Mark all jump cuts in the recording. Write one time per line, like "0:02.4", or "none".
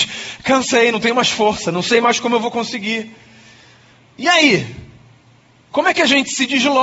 none